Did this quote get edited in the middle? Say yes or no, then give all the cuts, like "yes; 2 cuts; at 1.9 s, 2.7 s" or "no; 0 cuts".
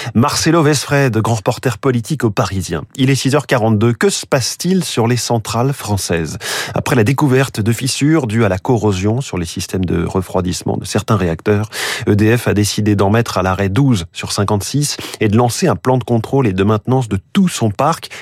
no; 0 cuts